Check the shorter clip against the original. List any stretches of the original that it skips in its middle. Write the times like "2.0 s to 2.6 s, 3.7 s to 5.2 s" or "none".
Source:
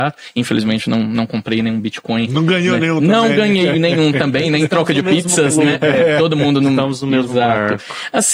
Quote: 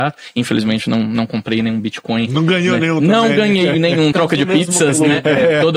4.1 s to 4.7 s